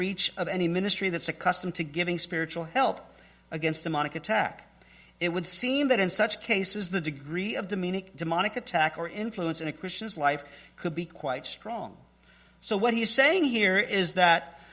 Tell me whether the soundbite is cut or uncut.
uncut